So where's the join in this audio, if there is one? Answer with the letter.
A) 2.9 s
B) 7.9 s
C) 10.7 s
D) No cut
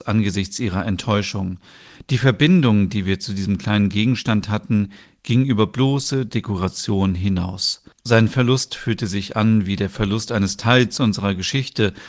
B